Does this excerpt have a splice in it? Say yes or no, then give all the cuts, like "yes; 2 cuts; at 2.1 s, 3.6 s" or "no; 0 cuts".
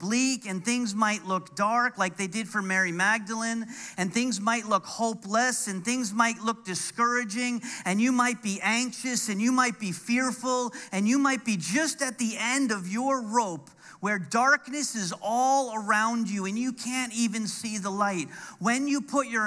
no; 0 cuts